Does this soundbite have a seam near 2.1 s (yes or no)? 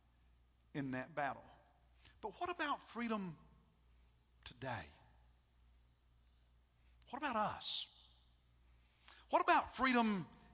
yes